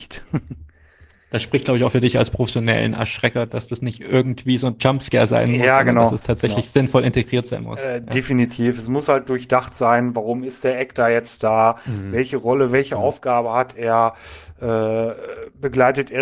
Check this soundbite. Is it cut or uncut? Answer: uncut